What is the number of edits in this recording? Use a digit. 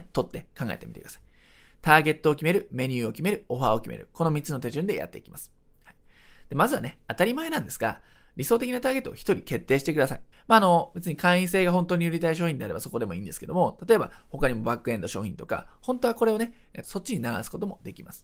2